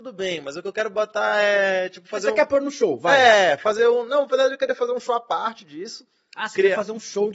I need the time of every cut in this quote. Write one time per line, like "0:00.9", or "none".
none